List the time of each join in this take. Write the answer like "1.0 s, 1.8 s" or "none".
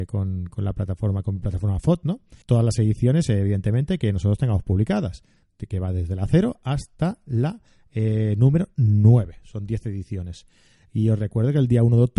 2.4 s